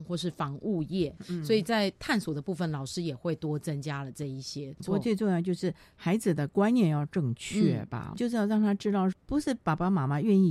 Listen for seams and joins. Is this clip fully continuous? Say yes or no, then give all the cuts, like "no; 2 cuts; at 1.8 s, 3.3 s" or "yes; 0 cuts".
no; 3 cuts; at 1.2 s, 4.8 s, 8.1 s